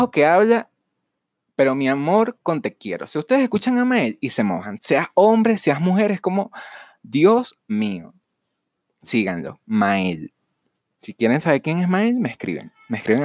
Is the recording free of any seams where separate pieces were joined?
no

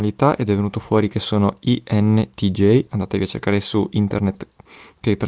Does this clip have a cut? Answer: no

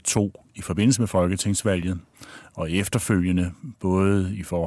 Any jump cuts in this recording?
no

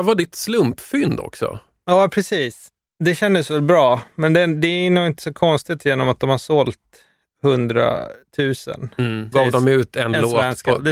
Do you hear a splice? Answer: yes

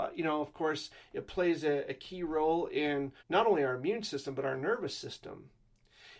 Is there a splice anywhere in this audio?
yes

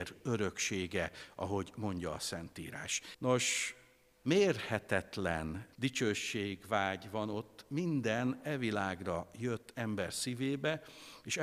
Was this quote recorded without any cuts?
no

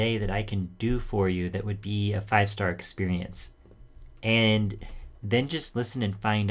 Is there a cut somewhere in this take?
no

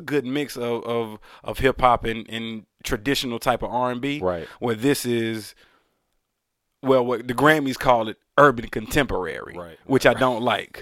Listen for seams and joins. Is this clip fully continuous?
yes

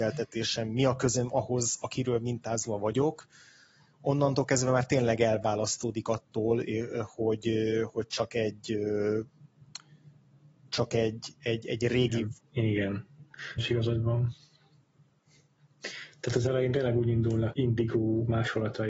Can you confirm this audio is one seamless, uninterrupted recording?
no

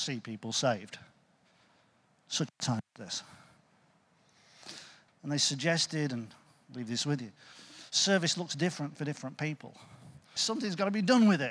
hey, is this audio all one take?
no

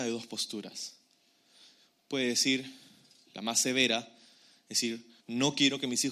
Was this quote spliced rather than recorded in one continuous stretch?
yes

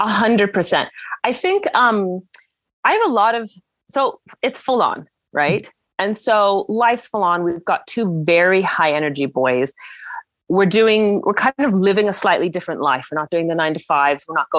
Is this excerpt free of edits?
yes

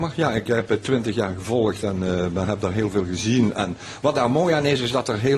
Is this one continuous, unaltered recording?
yes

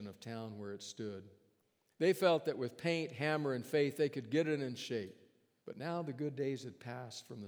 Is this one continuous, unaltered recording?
no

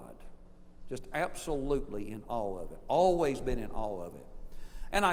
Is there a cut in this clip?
no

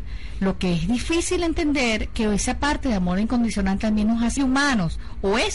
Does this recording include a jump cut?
yes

